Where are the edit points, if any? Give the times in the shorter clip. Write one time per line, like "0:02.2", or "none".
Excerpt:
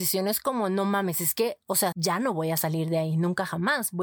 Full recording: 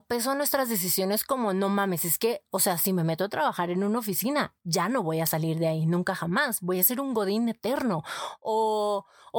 0:01.9